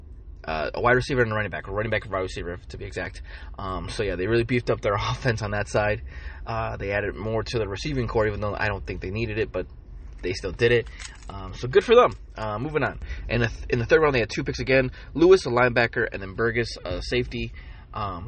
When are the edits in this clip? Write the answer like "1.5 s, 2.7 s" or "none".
none